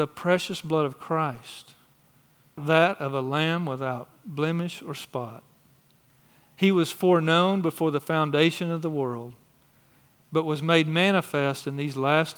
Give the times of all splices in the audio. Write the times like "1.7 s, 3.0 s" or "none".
2.6 s